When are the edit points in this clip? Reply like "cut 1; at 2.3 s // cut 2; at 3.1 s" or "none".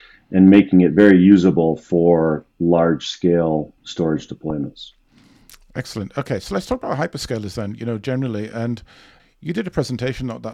none